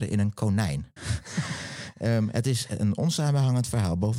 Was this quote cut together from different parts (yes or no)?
yes